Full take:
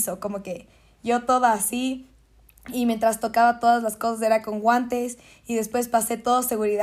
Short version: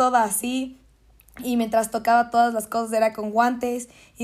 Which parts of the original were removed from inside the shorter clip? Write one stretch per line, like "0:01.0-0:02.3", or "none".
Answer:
none